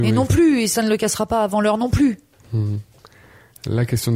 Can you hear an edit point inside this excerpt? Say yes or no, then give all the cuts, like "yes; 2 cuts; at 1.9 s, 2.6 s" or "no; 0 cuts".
no; 0 cuts